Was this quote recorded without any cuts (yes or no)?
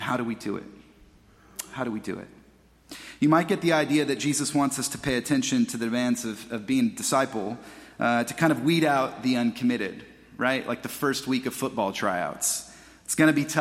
yes